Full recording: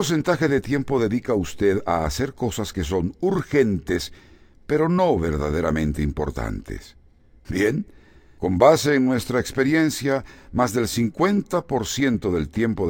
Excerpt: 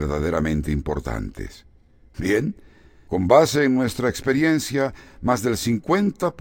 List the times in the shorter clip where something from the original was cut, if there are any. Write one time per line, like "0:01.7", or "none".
none